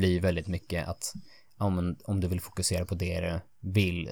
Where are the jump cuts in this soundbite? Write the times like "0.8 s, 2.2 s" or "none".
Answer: none